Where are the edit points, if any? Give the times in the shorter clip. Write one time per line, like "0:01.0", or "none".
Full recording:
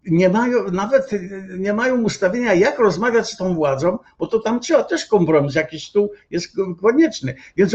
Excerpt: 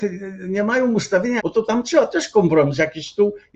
0:01.4